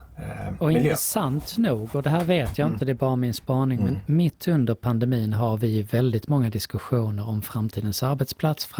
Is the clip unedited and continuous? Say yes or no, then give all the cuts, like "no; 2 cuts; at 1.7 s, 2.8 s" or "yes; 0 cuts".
yes; 0 cuts